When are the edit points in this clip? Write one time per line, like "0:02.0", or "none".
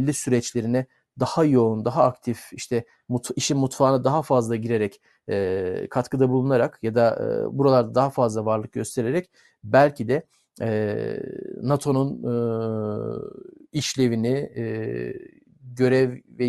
none